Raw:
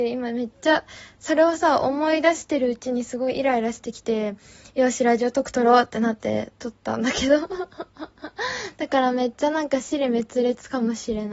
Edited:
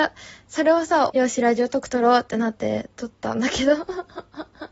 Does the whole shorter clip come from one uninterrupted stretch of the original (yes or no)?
no